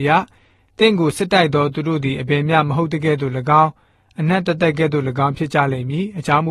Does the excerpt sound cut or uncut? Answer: cut